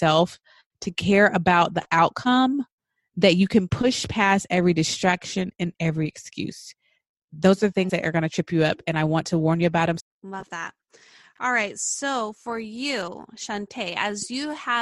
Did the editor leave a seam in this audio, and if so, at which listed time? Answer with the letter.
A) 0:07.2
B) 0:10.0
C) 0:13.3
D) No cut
B